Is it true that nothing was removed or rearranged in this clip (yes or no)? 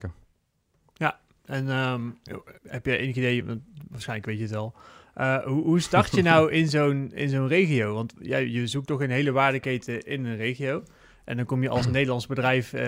no